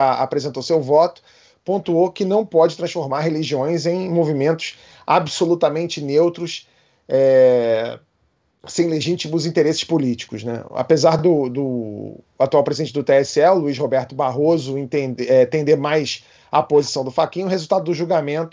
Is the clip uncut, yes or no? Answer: yes